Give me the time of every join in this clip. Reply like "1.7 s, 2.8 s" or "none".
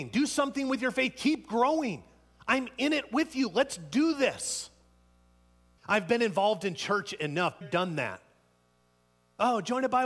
5.8 s, 7.6 s